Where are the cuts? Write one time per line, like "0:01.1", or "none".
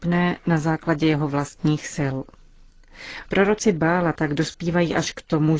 0:03.2